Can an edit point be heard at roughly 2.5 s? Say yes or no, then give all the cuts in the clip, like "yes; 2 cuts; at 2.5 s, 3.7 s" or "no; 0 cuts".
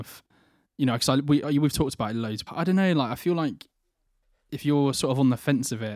yes; 1 cut; at 2.5 s